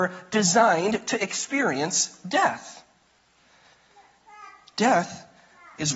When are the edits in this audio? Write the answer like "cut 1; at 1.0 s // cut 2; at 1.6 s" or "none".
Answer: none